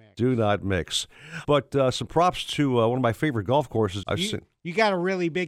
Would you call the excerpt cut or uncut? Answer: cut